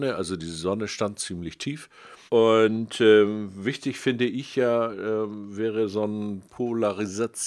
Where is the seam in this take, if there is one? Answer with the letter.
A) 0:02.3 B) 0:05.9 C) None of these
A